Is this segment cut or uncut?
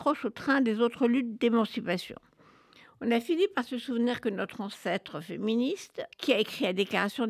cut